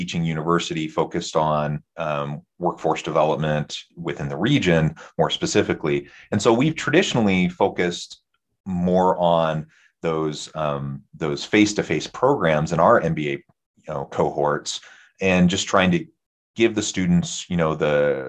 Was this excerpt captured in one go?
yes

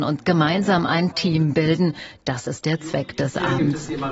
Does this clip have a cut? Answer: no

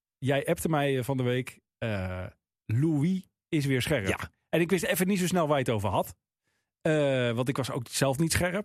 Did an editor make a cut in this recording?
no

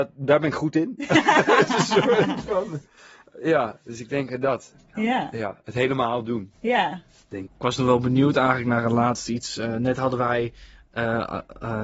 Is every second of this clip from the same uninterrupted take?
no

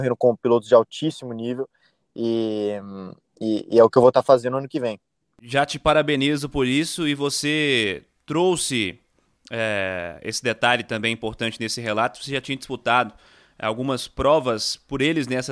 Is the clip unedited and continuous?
yes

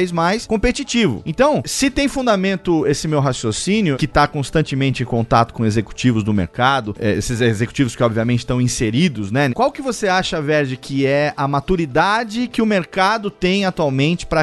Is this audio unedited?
no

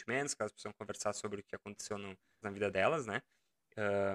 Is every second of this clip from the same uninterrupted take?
no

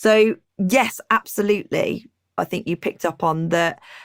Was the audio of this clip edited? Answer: yes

